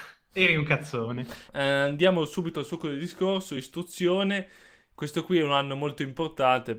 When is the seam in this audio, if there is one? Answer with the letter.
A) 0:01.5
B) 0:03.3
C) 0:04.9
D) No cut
A